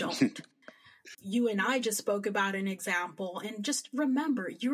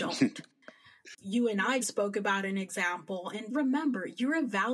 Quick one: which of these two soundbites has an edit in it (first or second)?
second